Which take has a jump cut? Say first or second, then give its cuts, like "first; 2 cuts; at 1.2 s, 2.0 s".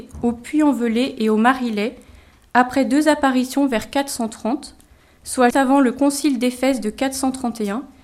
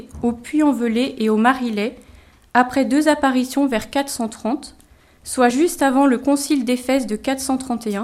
first; 1 cut; at 5.5 s